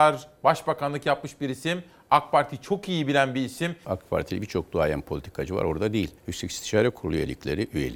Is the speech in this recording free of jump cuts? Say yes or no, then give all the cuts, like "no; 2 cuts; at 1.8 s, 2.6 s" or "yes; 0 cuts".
no; 2 cuts; at 3.8 s, 6.2 s